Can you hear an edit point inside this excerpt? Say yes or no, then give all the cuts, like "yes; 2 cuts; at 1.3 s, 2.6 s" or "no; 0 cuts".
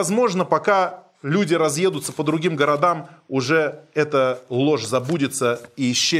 no; 0 cuts